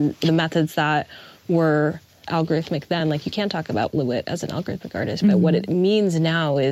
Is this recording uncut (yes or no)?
yes